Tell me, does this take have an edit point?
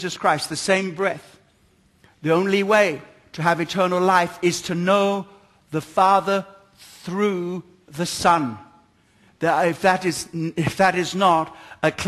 no; 0 cuts

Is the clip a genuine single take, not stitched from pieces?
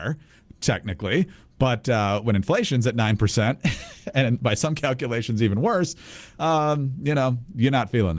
yes; 0 cuts

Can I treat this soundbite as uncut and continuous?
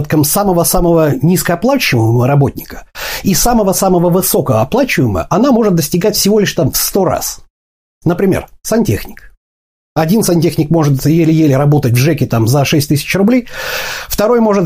yes; 0 cuts

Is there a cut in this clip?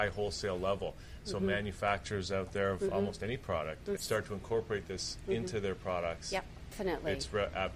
yes; 2 cuts; at 4.0 s, 6.7 s

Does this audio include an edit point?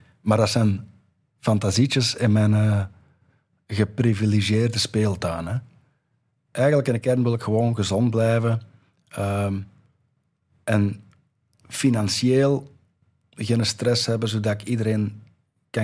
no; 0 cuts

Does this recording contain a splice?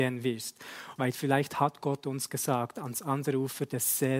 yes; 1 cut; at 1.0 s

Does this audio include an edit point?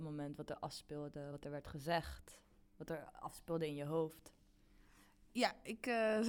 no; 0 cuts

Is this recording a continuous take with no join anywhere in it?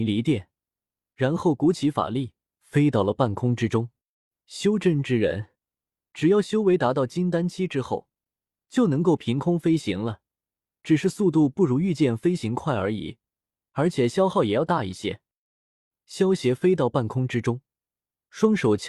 yes; 0 cuts

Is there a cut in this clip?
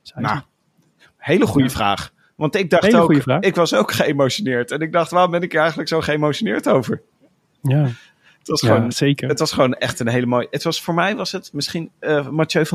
no; 0 cuts

